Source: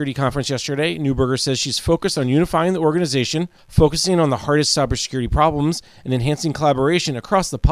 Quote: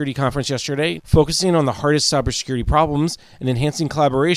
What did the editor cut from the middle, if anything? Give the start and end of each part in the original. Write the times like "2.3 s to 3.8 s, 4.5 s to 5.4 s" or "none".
1.0 s to 3.6 s